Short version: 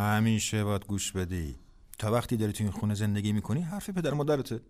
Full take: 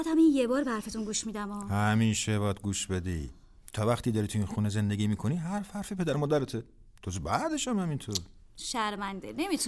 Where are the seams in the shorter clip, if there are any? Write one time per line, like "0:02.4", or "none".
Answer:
0:03.7